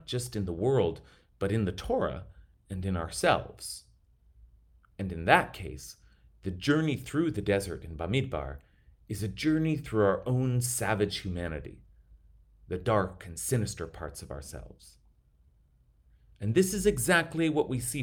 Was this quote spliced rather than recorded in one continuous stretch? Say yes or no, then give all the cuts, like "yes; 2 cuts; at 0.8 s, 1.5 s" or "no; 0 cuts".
no; 0 cuts